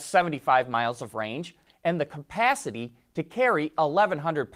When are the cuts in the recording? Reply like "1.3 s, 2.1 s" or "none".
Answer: 1.7 s